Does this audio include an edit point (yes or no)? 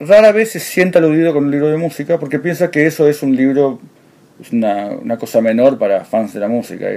no